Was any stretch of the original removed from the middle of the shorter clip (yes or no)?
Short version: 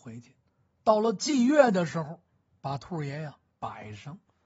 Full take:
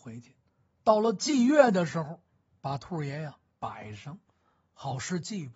no